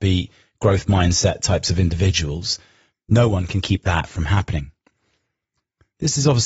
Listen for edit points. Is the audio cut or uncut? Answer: cut